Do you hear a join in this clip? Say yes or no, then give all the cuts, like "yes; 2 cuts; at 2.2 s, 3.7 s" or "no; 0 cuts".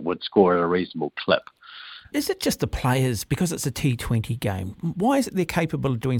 yes; 2 cuts; at 2.1 s, 4.8 s